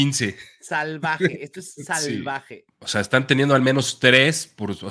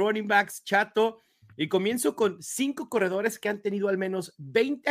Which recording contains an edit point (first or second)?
first